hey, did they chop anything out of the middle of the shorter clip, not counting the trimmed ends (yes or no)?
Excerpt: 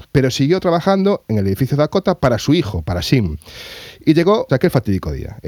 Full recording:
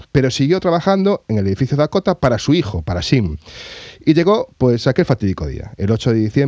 yes